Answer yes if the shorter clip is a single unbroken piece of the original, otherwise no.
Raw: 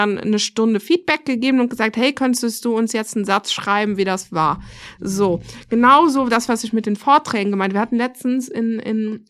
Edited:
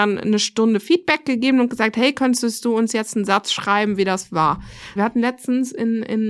no